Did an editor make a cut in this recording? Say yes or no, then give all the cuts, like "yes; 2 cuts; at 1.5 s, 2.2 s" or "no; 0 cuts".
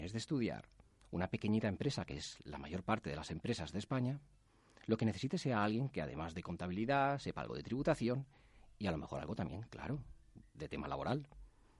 no; 0 cuts